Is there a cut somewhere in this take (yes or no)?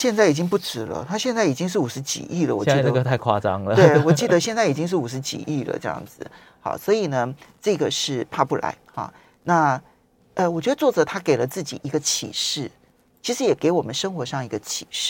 no